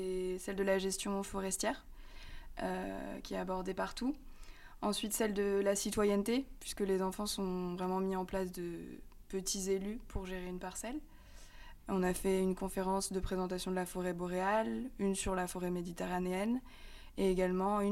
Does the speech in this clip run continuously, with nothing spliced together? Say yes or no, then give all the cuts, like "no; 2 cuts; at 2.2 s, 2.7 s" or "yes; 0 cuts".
no; 1 cut; at 11.8 s